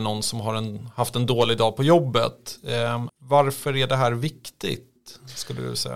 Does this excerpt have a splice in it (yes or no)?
yes